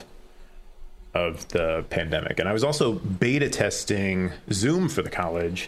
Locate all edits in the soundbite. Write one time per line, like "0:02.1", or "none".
none